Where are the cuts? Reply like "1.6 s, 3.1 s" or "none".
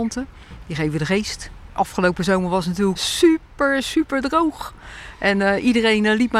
3.0 s